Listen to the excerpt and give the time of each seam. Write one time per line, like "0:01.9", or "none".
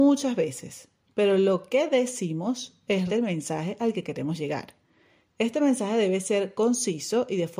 0:03.1